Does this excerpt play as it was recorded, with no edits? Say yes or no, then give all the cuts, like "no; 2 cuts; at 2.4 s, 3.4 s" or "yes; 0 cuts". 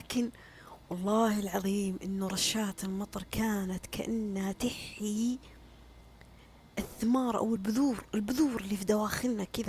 yes; 0 cuts